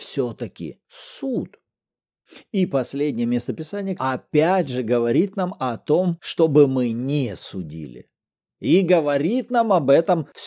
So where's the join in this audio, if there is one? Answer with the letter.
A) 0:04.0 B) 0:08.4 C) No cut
A